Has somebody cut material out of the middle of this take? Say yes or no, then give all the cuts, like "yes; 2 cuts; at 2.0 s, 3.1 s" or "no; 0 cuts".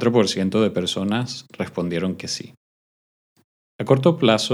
no; 0 cuts